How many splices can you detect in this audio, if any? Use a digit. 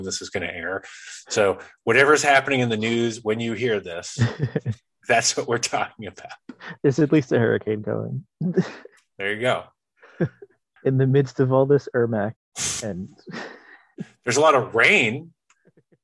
2